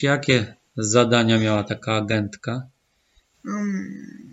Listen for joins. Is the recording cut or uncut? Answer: uncut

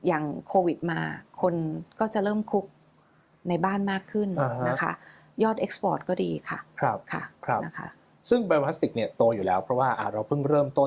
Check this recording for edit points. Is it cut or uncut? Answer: uncut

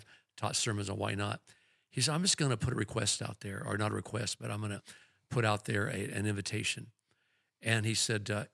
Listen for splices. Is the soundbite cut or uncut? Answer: uncut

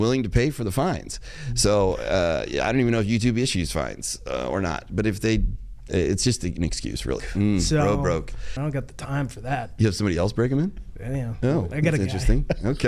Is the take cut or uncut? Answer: cut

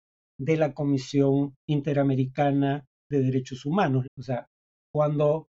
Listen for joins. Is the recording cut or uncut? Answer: cut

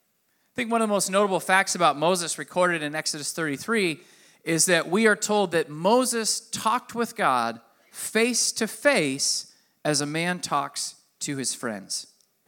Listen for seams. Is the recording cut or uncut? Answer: uncut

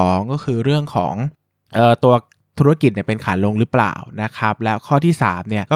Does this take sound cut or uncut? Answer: uncut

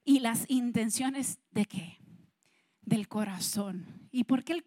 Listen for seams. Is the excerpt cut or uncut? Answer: uncut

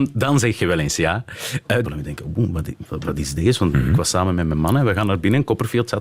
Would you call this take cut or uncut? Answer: cut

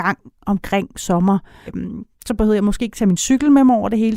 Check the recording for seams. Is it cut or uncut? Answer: cut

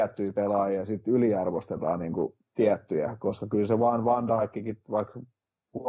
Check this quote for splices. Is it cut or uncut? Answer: uncut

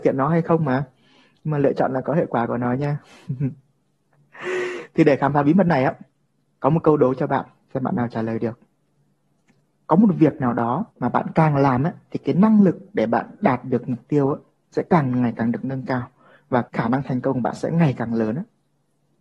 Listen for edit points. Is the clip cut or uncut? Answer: cut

